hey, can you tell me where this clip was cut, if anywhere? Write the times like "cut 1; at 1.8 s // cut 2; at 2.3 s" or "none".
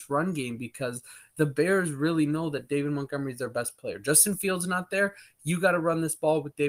none

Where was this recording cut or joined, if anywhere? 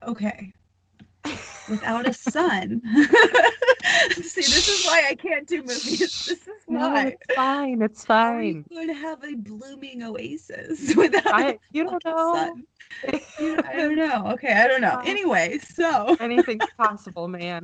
none

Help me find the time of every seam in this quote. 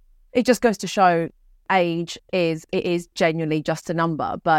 none

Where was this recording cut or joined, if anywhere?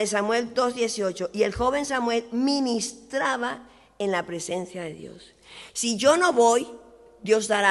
cut 1; at 5.7 s

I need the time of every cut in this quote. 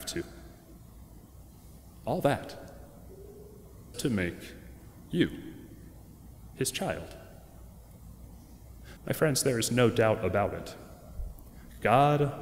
cut 1; at 3.9 s // cut 2; at 9.0 s

